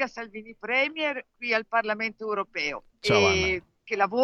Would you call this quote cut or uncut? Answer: cut